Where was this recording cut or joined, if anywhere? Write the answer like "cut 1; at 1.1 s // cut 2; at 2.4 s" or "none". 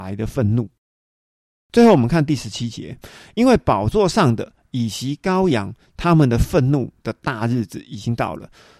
none